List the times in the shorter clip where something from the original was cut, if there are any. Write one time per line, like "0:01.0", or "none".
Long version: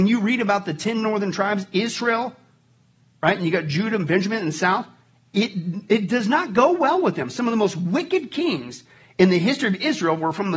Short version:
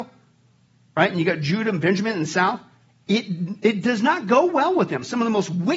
none